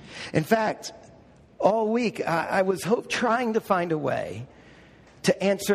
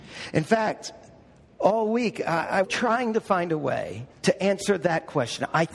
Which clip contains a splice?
second; 2 cuts; at 2.6 s, 4.1 s

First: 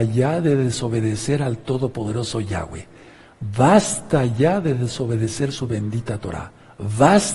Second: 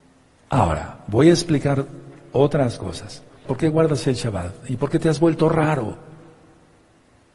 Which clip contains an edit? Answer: second; 1 cut; at 3.4 s

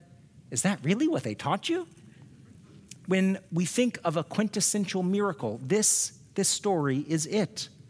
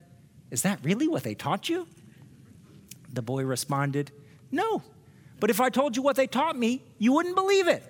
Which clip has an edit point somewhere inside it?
first; 1 cut; at 3.1 s

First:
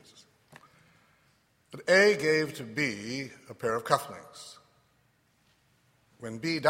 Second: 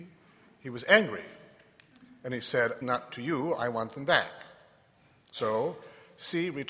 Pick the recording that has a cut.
second; 1 cut; at 2.8 s

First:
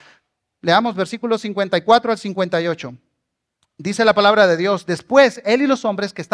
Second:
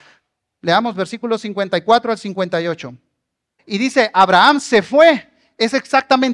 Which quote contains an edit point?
second; 1 cut; at 3.6 s

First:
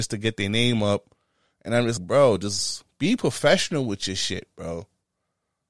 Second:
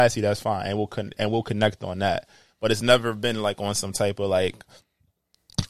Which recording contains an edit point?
first; 1 cut; at 2.0 s

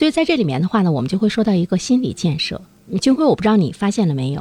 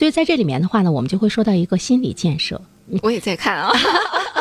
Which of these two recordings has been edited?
second; 1 cut; at 3.0 s

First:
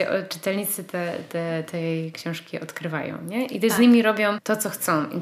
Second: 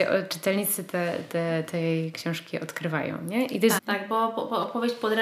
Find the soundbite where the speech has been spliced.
second; 1 cut; at 3.8 s

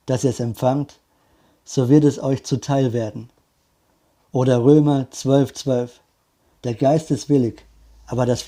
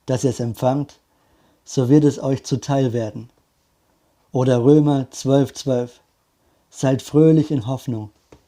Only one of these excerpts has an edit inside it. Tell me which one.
first; 1 cut; at 6.5 s

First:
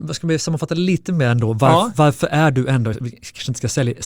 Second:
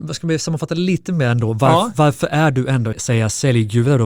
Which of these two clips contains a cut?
second; 1 cut; at 2.9 s

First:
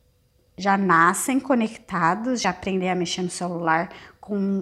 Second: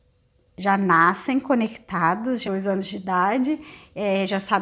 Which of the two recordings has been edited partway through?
second; 1 cut; at 2.4 s

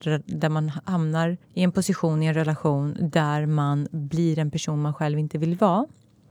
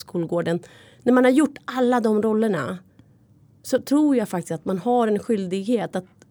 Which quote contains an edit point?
first; 1 cut; at 1.4 s

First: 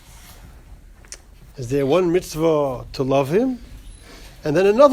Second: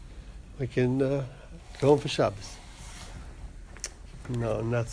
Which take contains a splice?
first; 1 cut; at 1.5 s

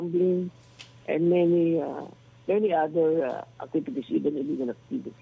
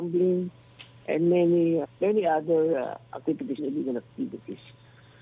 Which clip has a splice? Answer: second; 2 cuts; at 1.8 s, 3.6 s

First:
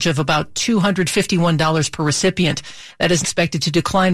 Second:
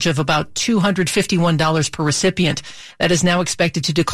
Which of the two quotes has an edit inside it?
first; 1 cut; at 3.2 s

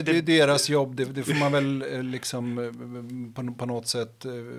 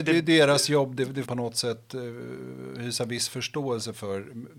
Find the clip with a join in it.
second; 1 cut; at 1.2 s

